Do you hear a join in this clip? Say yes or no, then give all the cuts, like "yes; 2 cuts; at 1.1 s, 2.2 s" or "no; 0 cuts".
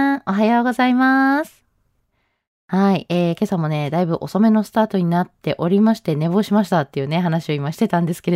no; 0 cuts